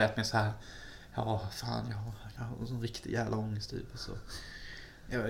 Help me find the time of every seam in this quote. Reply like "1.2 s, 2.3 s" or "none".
none